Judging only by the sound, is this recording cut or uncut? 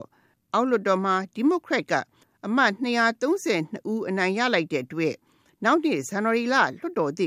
uncut